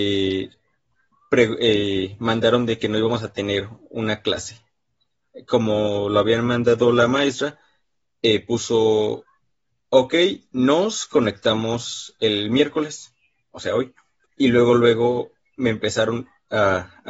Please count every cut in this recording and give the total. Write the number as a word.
one